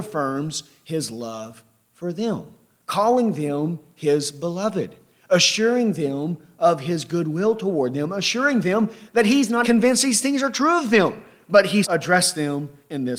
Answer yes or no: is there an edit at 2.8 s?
no